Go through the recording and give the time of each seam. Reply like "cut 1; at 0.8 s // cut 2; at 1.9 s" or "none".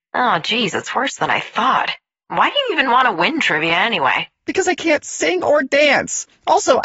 none